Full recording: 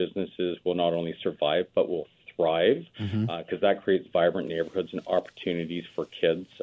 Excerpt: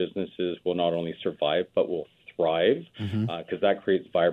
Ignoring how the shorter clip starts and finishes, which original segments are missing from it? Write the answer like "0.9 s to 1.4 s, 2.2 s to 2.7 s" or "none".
none